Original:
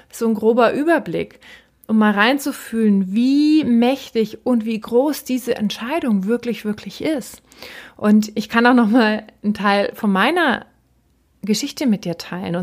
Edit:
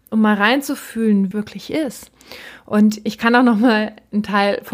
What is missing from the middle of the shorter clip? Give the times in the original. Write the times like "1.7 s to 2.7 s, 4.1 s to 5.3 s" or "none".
3.1 s to 6.6 s